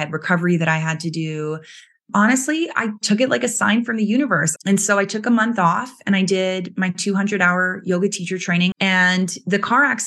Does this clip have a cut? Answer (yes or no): yes